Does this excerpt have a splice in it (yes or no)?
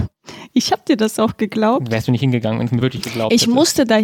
no